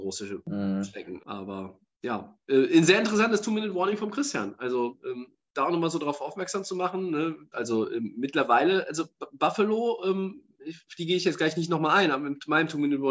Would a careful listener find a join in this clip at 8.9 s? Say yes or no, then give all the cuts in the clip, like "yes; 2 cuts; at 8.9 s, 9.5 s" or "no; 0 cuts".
no; 2 cuts; at 1.2 s, 7.5 s